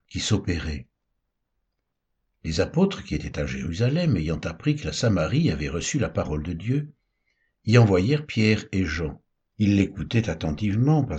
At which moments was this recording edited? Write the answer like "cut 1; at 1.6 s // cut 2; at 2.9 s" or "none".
cut 1; at 9.5 s